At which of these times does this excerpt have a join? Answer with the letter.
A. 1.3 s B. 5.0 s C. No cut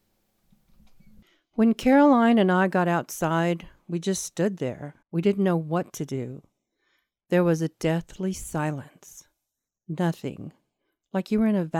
B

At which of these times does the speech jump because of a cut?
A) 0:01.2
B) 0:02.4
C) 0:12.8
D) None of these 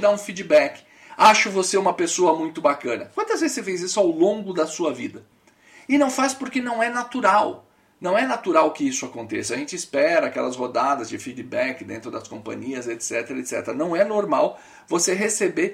D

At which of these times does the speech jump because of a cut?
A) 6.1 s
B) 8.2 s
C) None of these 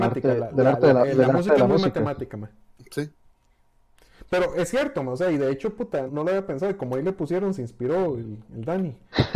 A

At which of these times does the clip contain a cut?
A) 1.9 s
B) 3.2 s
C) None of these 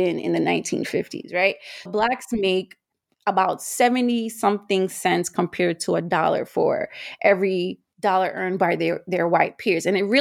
A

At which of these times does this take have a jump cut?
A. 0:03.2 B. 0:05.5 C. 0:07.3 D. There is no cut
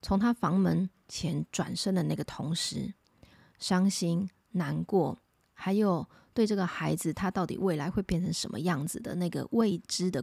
D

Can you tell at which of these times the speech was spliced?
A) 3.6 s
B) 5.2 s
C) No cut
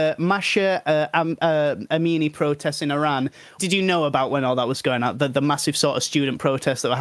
A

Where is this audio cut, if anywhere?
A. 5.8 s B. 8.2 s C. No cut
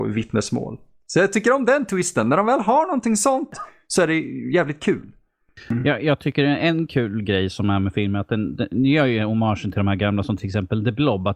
C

